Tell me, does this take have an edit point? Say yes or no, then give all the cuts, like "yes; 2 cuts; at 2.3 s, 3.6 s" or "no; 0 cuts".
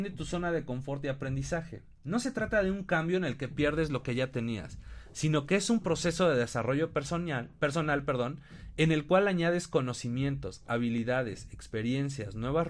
no; 0 cuts